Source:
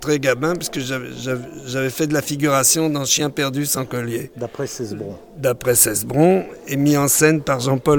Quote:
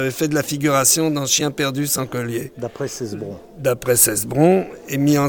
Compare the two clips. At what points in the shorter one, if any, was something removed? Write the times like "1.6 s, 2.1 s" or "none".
none